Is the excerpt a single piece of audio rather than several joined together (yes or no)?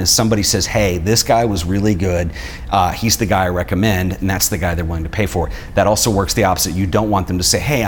yes